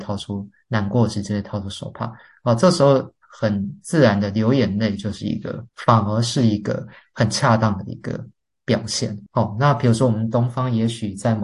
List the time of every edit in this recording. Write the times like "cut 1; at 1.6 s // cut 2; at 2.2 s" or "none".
none